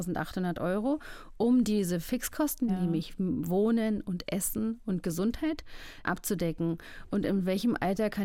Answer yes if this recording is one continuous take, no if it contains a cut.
no